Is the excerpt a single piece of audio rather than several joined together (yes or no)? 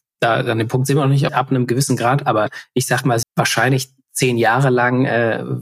no